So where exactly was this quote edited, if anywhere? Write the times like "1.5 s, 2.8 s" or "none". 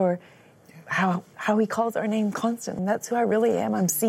2.8 s